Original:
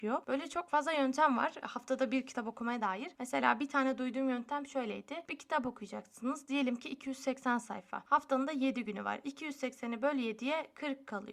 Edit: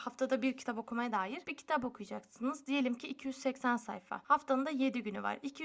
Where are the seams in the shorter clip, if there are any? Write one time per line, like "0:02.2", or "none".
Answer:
0:01.4